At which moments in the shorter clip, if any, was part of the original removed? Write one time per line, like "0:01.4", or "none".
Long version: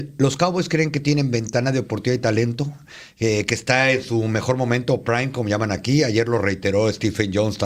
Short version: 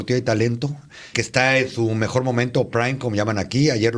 0:01.1